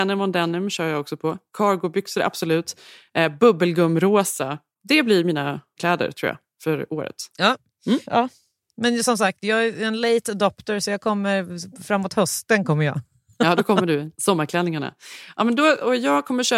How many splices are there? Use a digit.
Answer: 1